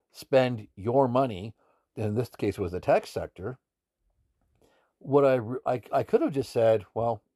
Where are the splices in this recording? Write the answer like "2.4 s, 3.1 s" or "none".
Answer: 1.9 s

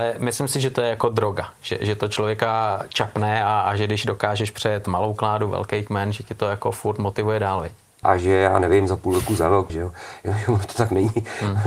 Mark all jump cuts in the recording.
8.0 s, 9.7 s

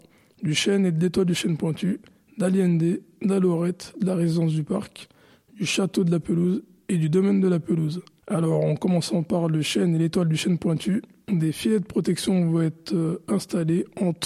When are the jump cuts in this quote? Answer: 8.2 s

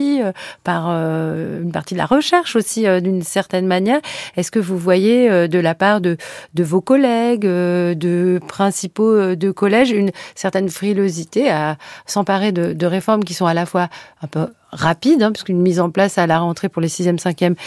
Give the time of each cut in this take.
none

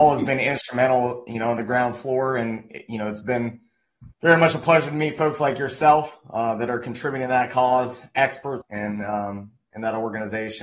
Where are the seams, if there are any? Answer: 4.1 s, 8.6 s

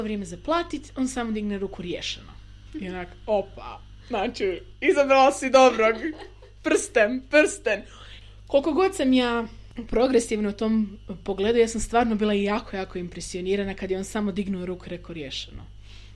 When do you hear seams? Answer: none

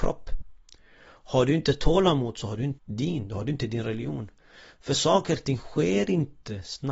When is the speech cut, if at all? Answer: 2.8 s

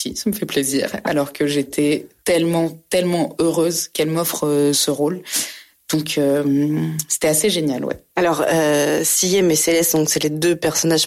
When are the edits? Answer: none

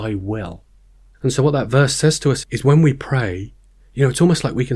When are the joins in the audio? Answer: 2.4 s

